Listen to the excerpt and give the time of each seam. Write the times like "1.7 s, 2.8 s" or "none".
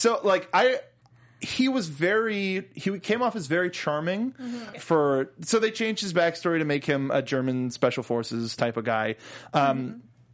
4.7 s